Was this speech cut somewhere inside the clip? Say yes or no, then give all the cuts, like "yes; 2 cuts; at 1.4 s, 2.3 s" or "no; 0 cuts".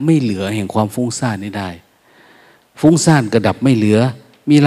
no; 0 cuts